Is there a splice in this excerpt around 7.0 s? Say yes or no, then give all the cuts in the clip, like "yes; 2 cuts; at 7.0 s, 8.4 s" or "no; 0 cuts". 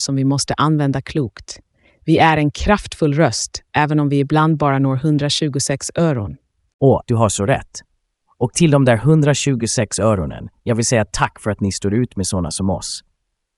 yes; 1 cut; at 7.0 s